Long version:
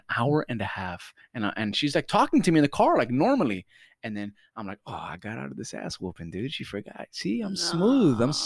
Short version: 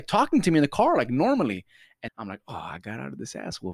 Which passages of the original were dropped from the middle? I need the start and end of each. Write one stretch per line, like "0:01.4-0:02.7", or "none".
0:04.1-0:04.5